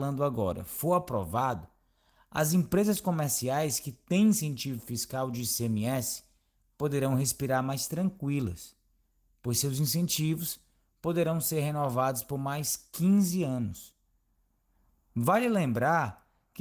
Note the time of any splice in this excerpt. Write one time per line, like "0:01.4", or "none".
none